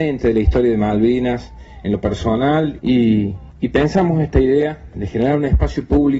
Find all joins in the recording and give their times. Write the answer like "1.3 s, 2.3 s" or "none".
2.8 s, 4.9 s